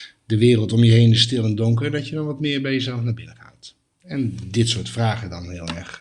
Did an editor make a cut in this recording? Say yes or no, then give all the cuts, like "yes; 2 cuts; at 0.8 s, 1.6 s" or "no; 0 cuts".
no; 0 cuts